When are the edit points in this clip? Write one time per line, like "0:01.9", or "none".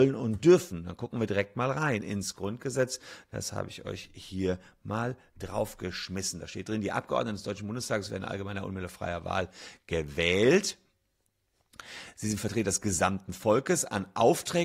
none